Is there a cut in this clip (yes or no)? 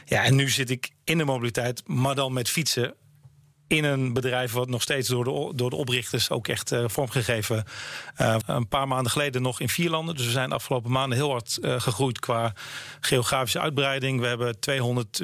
yes